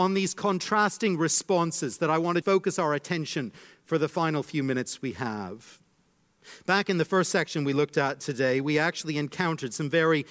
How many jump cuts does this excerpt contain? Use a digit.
1